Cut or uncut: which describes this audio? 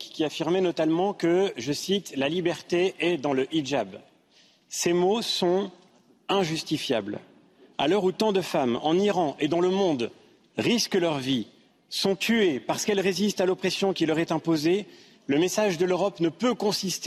uncut